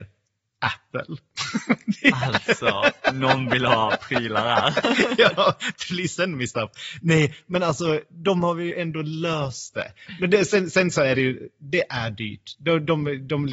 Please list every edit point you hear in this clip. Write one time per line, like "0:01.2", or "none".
none